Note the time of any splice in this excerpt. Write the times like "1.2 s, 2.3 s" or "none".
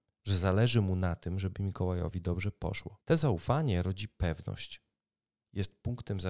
3.0 s